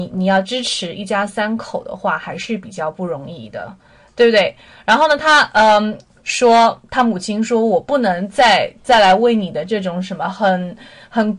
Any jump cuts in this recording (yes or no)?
no